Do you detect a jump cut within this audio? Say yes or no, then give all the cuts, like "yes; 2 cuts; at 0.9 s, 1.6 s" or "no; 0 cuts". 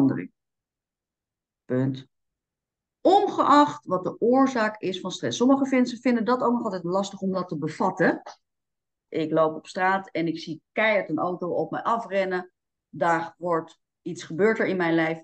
yes; 1 cut; at 9.1 s